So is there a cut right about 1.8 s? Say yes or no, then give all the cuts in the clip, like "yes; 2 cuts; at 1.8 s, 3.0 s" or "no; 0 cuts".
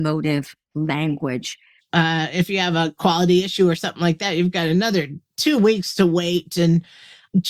yes; 1 cut; at 1.8 s